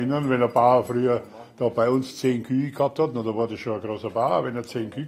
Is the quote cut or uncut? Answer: uncut